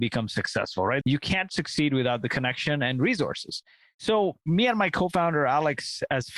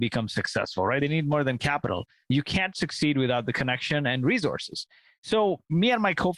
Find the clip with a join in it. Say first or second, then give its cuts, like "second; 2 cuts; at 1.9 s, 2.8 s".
first; 1 cut; at 1.0 s